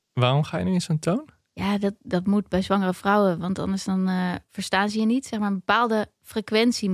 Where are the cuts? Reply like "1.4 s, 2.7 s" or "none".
none